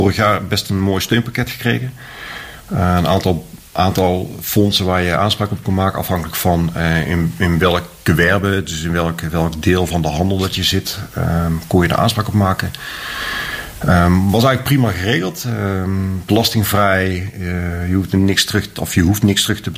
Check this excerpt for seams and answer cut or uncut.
uncut